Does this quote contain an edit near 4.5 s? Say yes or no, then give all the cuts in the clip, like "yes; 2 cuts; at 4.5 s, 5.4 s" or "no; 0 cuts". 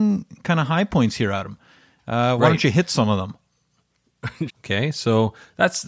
yes; 1 cut; at 4.5 s